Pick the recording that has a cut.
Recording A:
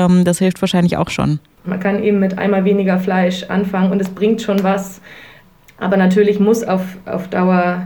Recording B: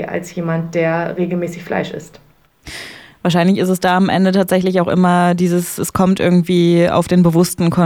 A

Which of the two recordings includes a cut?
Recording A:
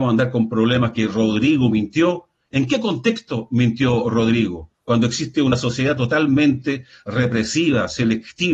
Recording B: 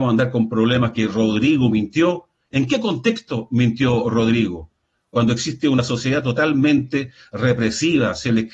A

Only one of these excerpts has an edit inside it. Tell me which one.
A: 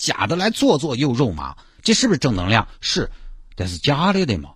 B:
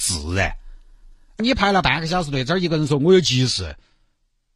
B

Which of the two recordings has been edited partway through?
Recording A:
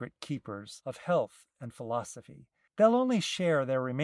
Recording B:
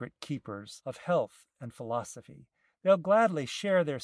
A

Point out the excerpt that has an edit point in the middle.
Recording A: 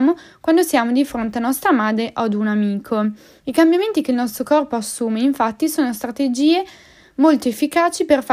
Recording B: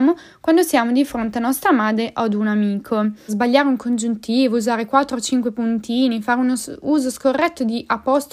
B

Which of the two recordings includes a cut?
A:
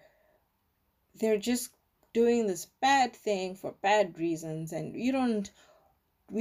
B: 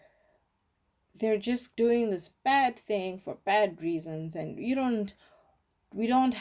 B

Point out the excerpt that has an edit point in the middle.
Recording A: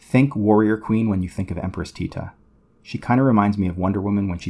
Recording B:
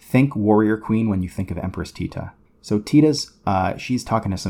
B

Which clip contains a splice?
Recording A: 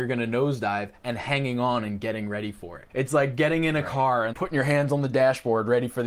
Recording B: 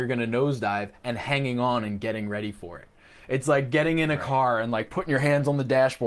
A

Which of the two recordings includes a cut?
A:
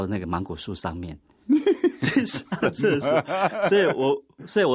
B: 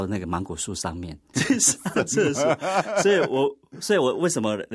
B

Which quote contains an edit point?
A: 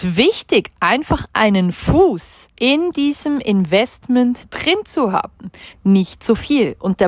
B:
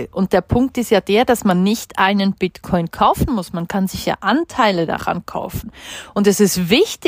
A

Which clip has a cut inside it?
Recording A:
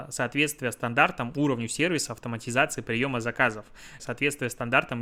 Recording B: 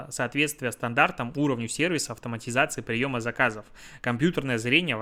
A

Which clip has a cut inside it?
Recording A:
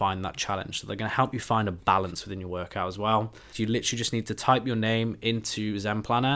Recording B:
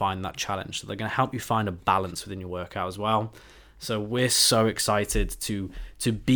A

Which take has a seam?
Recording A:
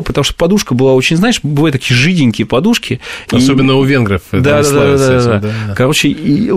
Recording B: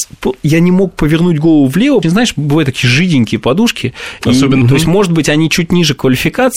B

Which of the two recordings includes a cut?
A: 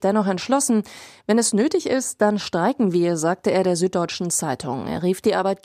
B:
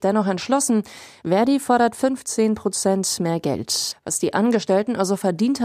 B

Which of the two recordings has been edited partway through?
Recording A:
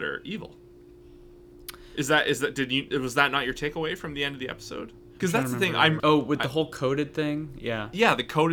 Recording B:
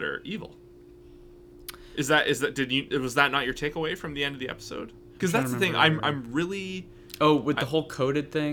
A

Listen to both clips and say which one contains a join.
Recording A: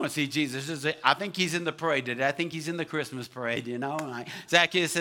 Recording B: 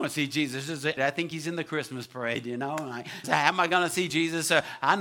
B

